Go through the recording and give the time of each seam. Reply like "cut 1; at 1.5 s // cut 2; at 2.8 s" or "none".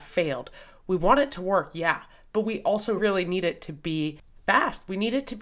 cut 1; at 3.0 s